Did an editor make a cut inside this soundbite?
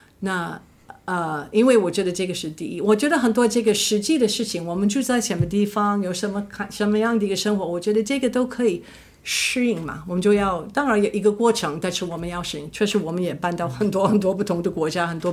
no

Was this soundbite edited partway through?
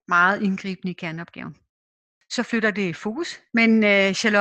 yes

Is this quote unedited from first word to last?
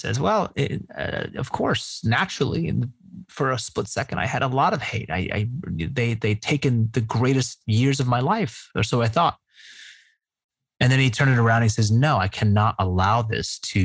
yes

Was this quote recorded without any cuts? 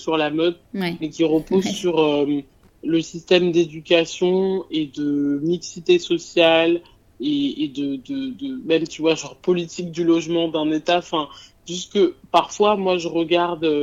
yes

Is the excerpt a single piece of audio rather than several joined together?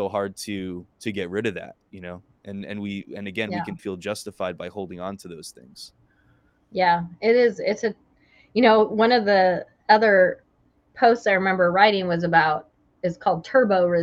no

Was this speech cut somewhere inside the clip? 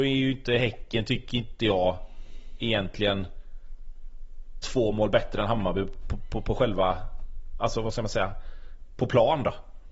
no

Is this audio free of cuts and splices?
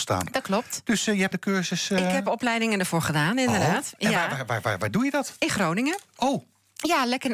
no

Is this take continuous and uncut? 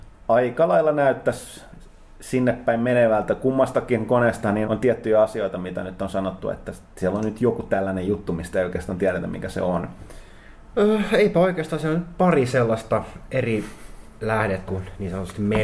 no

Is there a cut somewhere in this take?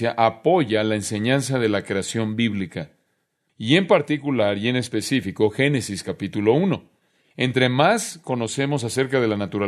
yes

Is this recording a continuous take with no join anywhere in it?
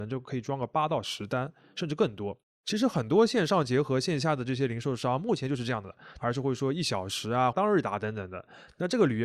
no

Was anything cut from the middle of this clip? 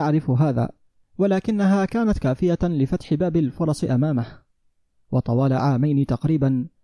no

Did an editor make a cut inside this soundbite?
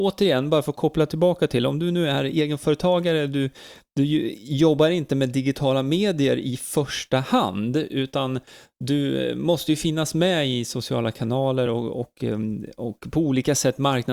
no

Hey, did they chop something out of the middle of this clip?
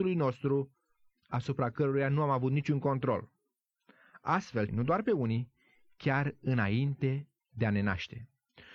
yes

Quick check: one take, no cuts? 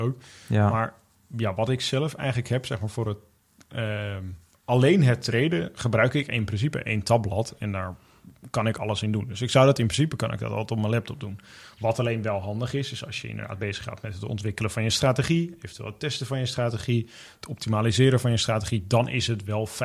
yes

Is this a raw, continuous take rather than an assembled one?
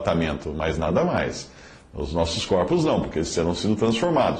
yes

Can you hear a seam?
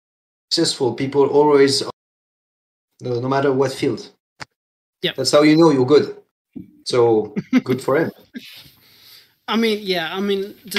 no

